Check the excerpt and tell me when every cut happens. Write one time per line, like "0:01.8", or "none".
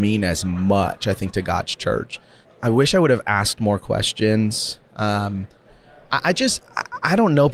0:02.4